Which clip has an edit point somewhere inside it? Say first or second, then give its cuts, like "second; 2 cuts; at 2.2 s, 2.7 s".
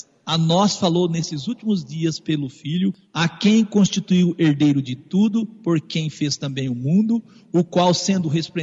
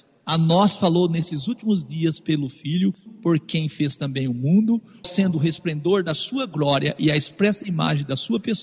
second; 2 cuts; at 3.1 s, 5.0 s